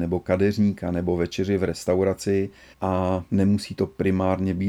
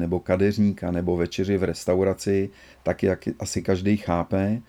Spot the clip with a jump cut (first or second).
first